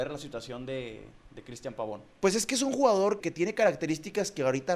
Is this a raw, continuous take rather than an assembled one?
no; 1 cut; at 3.2 s

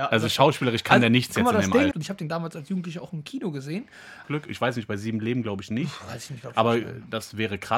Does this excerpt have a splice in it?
yes; 2 cuts; at 1.9 s, 4.2 s

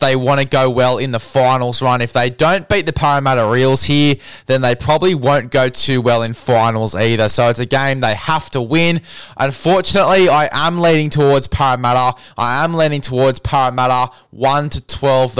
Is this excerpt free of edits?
yes; 0 cuts

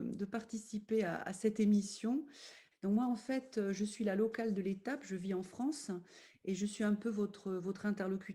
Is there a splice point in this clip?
yes; 1 cut; at 2.7 s

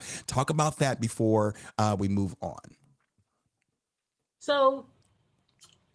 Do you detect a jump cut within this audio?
no; 0 cuts

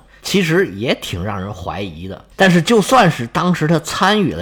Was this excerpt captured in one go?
no; 1 cut; at 2.3 s

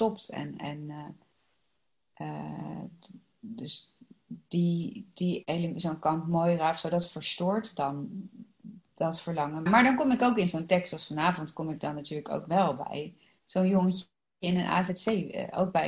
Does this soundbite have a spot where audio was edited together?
yes; 1 cut; at 9.7 s

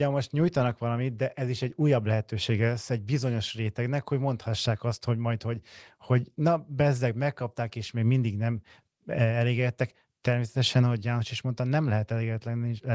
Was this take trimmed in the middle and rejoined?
no; 0 cuts

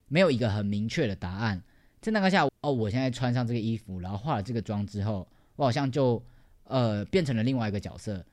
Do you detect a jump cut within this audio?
yes; 1 cut; at 2.5 s

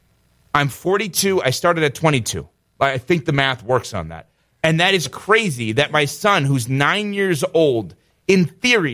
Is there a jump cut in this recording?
no; 0 cuts

